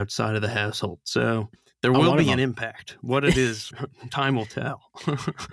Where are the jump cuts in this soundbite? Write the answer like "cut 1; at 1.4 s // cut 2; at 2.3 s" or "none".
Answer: cut 1; at 3.7 s